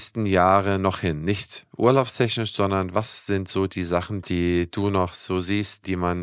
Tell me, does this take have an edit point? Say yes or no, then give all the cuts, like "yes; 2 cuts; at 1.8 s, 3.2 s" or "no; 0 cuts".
yes; 1 cut; at 4.2 s